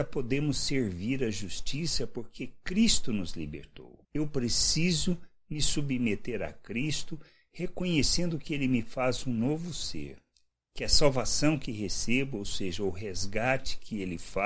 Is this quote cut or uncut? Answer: uncut